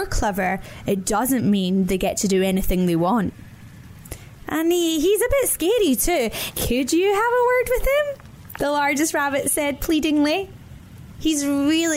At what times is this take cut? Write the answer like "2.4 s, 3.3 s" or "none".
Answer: 6.5 s